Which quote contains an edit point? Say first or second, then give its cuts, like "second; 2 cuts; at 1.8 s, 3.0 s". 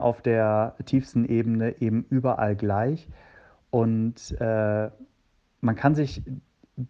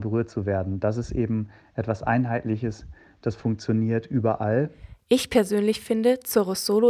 second; 1 cut; at 5.0 s